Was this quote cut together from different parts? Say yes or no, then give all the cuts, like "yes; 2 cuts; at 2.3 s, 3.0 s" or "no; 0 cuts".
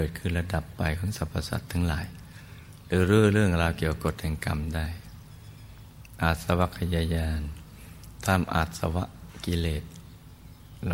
no; 0 cuts